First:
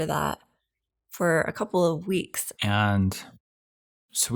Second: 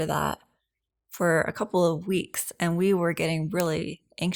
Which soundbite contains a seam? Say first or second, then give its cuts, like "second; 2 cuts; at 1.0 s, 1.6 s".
first; 1 cut; at 2.5 s